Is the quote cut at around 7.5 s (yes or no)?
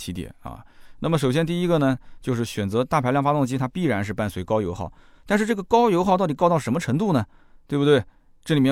no